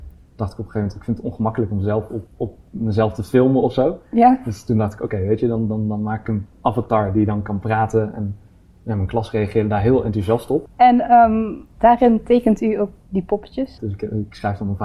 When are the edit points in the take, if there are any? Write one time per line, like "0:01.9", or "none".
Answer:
0:02.3
0:10.7
0:13.8